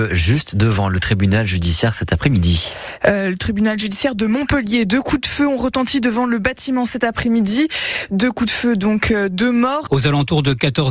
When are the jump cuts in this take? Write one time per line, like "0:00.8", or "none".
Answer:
0:09.9